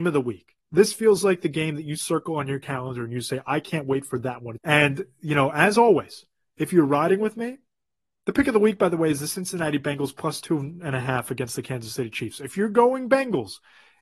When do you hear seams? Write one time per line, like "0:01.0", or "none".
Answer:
0:04.6